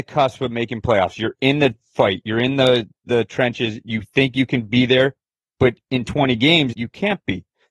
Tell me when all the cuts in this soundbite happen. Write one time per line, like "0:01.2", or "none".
0:06.7